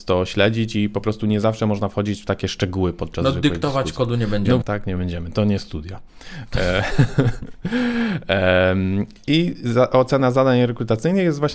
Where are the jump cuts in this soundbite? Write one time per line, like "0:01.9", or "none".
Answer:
0:04.6